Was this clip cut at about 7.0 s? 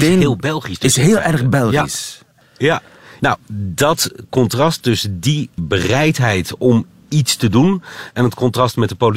no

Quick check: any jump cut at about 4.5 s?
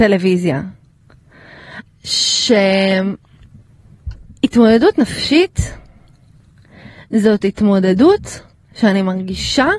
no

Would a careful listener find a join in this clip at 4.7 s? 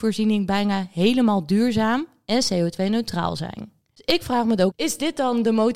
yes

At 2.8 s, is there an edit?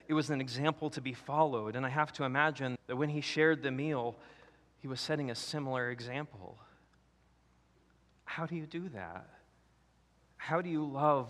yes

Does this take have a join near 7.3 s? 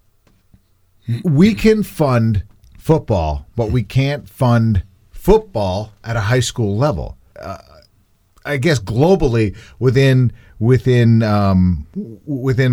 yes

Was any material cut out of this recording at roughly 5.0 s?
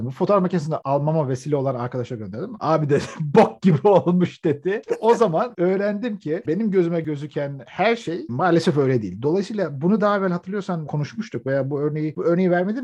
no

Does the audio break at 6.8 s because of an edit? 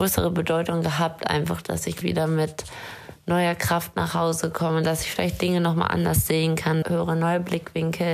yes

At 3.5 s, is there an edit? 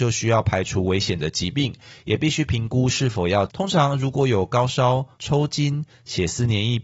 yes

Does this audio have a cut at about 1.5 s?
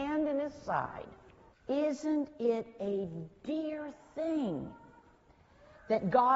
yes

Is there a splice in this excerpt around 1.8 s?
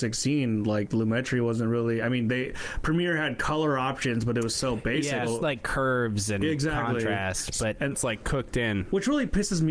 no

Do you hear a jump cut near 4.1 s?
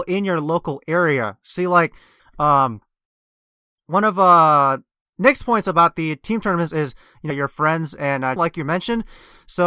no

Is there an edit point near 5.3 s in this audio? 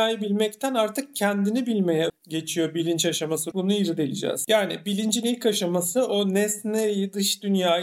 no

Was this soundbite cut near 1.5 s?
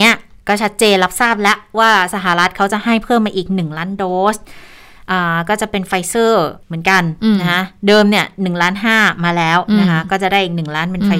no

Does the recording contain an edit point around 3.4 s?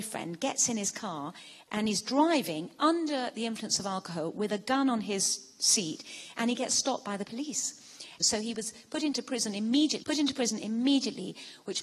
no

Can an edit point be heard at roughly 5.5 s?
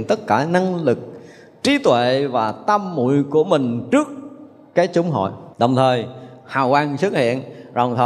yes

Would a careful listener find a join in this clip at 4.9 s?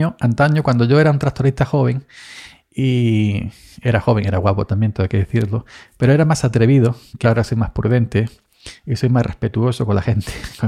no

